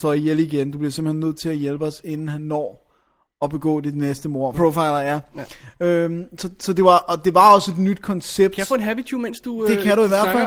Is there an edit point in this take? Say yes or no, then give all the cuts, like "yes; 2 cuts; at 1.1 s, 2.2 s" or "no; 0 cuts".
yes; 1 cut; at 4.5 s